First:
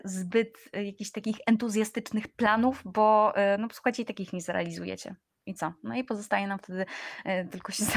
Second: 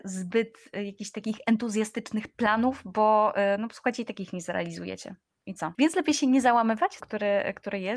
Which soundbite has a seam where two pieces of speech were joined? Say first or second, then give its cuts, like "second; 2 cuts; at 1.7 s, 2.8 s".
second; 2 cuts; at 5.7 s, 7.0 s